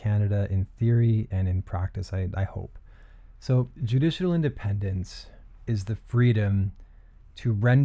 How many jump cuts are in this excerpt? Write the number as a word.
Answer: zero